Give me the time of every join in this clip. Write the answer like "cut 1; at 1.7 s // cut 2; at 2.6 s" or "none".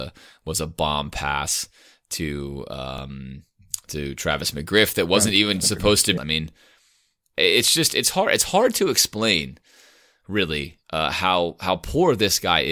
cut 1; at 6.2 s